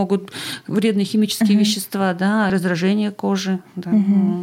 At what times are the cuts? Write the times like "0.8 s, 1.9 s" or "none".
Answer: 2.5 s